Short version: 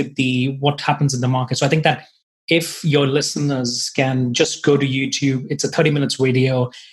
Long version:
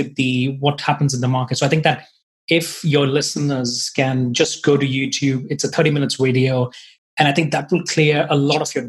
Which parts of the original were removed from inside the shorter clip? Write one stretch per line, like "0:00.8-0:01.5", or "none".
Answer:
none